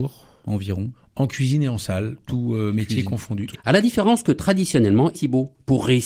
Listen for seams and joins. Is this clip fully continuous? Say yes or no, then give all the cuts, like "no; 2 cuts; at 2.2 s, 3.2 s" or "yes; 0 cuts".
no; 2 cuts; at 3.5 s, 5.1 s